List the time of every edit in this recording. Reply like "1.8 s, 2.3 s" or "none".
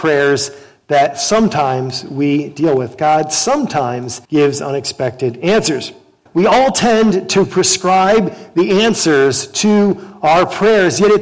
4.2 s, 6.3 s